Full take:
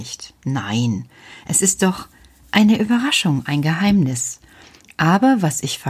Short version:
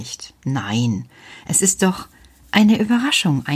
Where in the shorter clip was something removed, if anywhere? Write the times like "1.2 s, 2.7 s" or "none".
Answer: none